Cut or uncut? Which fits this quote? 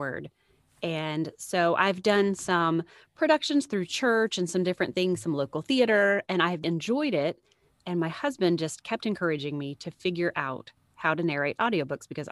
cut